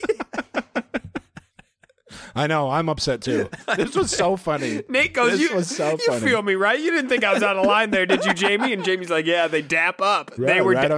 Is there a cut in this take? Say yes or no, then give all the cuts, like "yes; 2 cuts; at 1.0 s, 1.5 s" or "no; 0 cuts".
no; 0 cuts